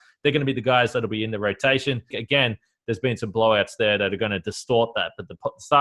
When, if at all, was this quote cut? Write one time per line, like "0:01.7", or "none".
0:02.1